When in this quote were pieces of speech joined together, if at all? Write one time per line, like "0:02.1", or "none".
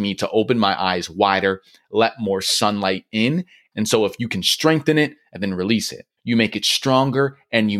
0:03.7
0:06.2